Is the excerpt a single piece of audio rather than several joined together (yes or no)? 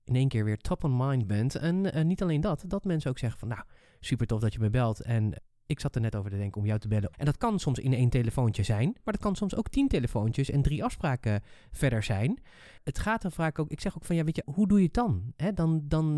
no